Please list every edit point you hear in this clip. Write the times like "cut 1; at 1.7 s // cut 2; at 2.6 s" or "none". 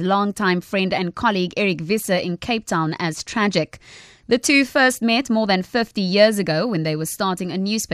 none

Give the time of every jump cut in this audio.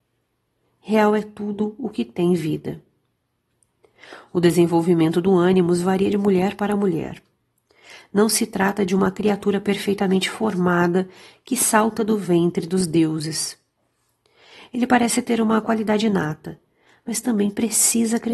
none

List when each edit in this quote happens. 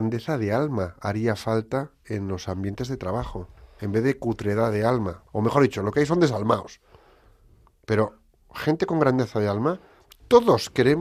cut 1; at 5.3 s

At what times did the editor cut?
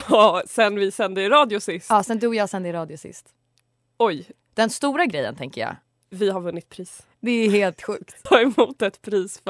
cut 1; at 8.3 s

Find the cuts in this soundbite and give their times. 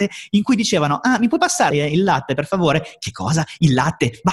cut 1; at 1.7 s

